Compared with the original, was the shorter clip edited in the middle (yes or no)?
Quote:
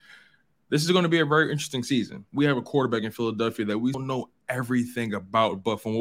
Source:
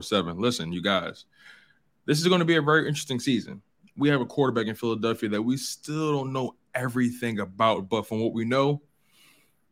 yes